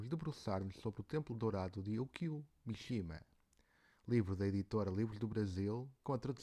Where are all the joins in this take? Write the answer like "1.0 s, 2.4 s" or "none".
none